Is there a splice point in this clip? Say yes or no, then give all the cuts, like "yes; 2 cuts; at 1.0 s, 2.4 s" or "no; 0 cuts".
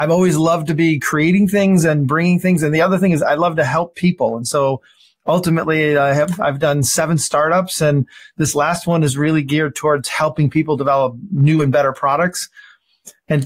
no; 0 cuts